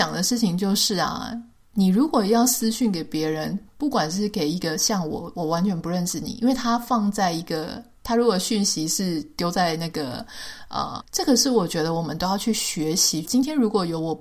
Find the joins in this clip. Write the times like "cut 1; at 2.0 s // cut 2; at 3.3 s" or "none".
cut 1; at 11.0 s // cut 2; at 13.2 s